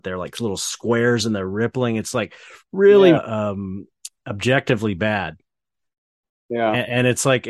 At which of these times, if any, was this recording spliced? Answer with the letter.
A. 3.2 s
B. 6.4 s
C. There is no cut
A